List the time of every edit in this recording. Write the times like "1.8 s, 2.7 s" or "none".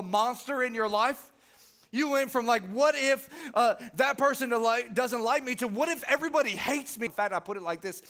7.1 s